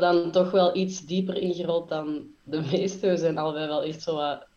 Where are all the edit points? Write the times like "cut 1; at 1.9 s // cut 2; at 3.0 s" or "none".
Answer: none